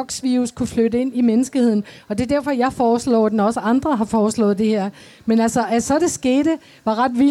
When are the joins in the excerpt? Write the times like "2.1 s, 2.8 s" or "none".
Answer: none